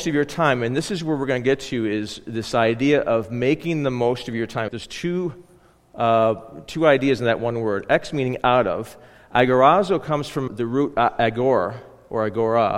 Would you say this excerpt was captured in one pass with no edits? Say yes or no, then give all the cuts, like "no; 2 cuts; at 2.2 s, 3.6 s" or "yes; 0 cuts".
no; 2 cuts; at 4.7 s, 10.5 s